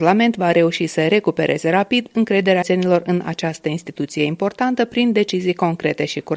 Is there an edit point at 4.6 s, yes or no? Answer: no